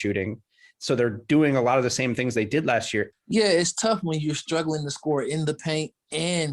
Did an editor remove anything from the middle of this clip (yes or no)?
yes